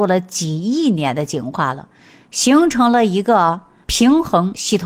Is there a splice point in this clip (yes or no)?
no